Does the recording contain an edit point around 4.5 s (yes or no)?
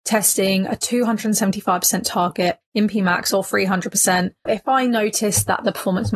yes